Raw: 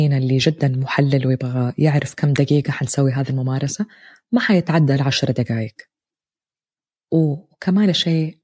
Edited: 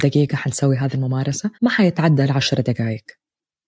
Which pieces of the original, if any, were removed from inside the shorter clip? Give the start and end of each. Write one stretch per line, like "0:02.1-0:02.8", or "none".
0:03.9-0:04.3